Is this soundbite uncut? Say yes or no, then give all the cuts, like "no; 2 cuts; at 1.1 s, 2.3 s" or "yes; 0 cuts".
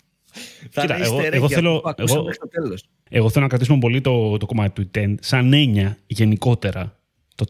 no; 1 cut; at 3.1 s